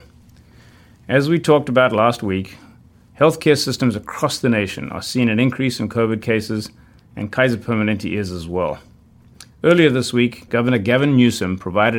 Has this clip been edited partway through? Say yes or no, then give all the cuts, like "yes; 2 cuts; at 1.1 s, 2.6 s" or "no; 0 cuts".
no; 0 cuts